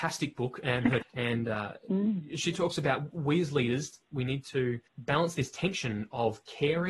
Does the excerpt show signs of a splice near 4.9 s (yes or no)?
yes